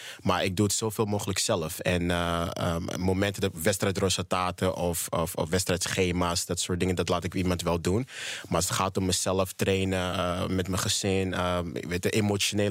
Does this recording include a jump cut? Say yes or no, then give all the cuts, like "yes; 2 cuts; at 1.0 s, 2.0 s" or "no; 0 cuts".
no; 0 cuts